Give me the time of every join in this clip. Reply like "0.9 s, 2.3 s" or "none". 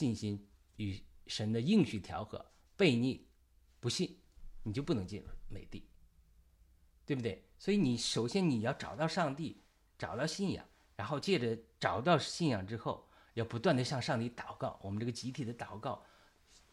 none

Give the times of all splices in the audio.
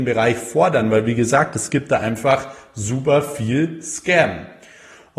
none

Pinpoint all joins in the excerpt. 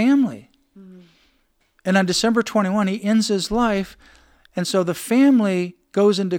none

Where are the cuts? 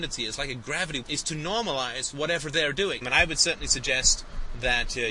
1.0 s, 3.0 s

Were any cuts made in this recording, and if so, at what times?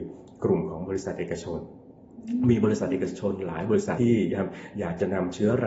4.0 s

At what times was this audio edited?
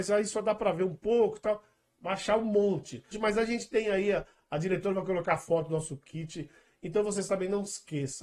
1.9 s, 3.1 s

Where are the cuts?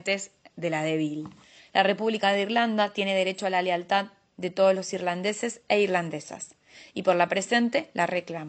1.6 s

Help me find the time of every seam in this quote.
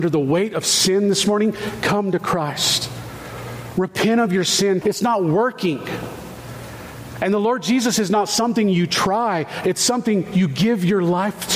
4.8 s

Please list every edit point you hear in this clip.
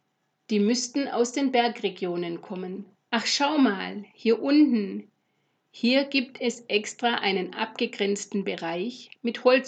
3.1 s

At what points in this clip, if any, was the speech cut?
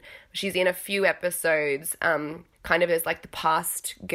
2.5 s

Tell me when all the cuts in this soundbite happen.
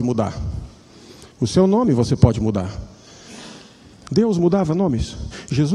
none

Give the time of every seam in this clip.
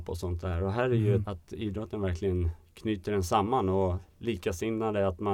1.2 s

